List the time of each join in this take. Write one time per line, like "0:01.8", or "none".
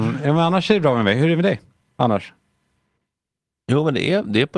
none